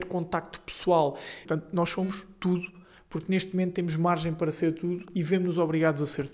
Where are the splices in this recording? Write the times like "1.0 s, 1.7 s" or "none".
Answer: 1.5 s